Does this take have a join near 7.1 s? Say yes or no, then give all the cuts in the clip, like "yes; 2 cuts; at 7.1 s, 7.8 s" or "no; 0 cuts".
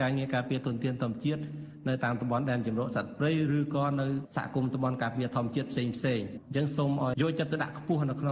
yes; 1 cut; at 7.1 s